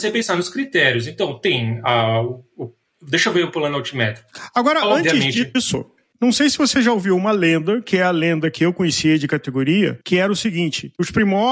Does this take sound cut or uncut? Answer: uncut